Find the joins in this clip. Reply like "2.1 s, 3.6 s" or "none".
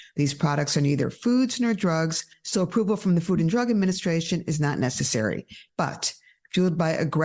5.7 s